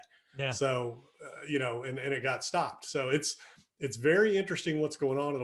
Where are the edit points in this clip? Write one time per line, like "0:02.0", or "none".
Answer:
none